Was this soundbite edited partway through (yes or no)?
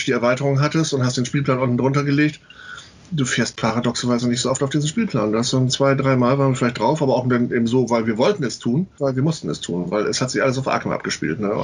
yes